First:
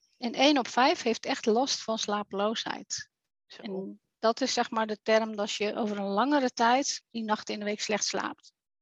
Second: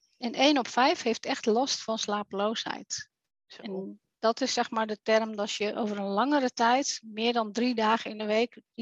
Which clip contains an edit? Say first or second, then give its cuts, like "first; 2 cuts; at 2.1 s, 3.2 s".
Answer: first; 1 cut; at 7.0 s